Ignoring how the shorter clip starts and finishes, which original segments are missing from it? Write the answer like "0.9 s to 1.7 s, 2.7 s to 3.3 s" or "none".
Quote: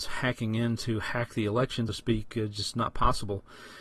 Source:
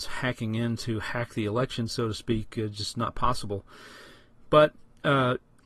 1.9 s to 2.1 s